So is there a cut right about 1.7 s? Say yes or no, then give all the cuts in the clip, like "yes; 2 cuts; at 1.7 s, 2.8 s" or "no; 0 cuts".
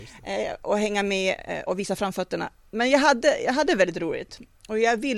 yes; 1 cut; at 1.7 s